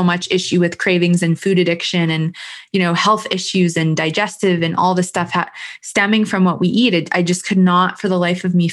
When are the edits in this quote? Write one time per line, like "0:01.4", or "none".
none